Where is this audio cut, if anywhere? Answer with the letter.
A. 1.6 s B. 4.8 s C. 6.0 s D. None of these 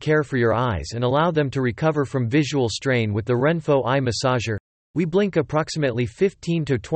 B